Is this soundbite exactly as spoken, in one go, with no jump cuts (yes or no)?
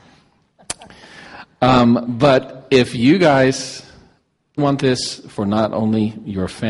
no